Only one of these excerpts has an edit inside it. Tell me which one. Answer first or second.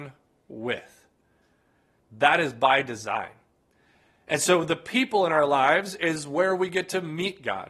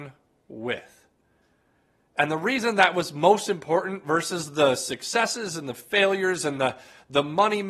first